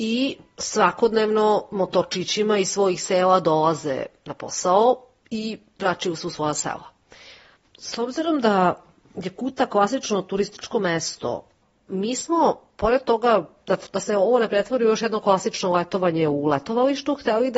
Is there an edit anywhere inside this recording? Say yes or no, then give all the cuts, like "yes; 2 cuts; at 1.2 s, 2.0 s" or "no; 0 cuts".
no; 0 cuts